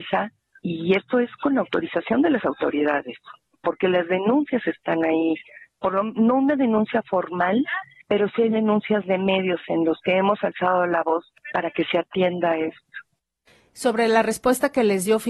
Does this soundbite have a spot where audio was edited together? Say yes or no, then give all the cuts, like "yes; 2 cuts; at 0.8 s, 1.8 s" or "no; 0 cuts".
no; 0 cuts